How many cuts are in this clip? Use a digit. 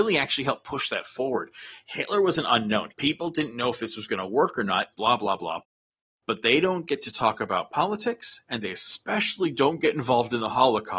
2